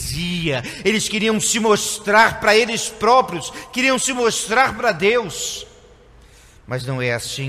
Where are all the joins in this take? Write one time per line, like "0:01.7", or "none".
none